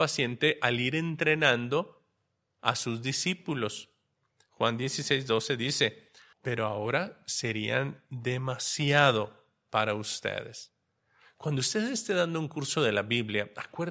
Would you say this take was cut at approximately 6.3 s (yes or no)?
yes